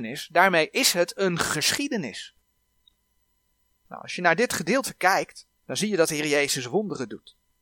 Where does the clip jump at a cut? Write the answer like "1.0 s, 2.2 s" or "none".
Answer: 3.7 s, 5.6 s